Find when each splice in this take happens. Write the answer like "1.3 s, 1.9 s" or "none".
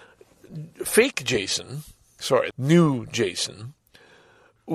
2.5 s